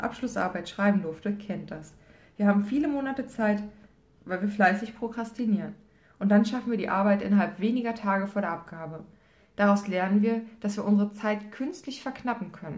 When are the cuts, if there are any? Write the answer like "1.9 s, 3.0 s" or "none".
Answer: 4.2 s